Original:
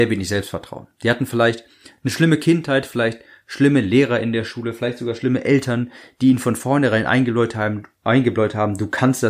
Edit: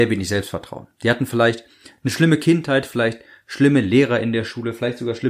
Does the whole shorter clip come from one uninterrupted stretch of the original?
yes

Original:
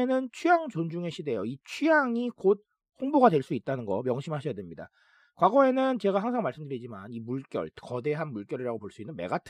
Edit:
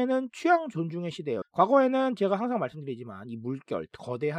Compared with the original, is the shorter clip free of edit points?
no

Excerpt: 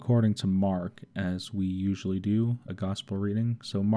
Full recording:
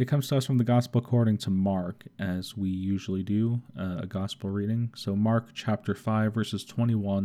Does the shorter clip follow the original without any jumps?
no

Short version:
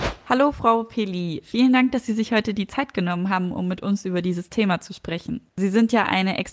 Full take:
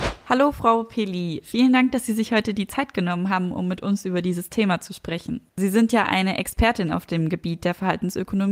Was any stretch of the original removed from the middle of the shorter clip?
no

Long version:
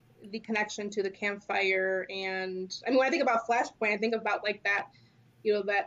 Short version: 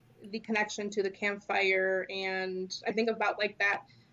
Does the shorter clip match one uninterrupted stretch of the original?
no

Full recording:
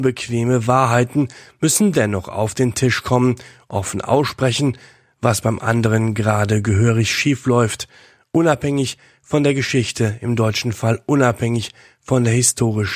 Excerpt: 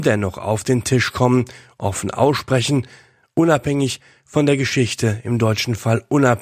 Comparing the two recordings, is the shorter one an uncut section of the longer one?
no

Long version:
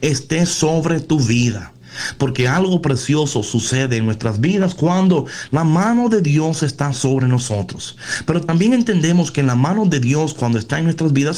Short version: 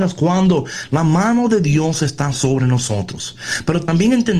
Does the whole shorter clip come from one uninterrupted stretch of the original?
yes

